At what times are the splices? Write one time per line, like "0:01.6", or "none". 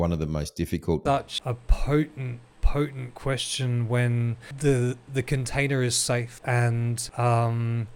0:01.1